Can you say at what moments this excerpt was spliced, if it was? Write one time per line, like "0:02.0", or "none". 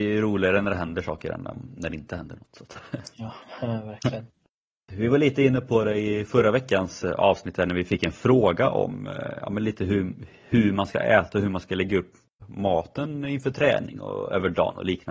0:04.9